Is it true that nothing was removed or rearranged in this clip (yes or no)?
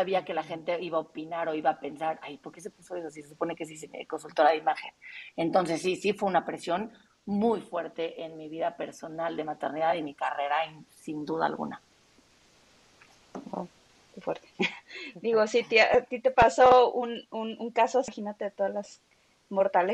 yes